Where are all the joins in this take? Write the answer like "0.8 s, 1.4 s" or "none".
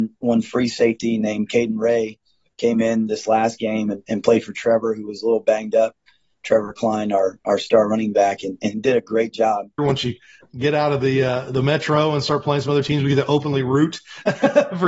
9.8 s